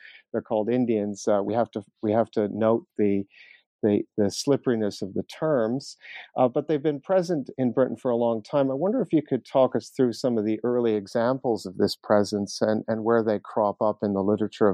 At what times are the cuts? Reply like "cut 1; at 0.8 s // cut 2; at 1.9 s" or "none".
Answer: none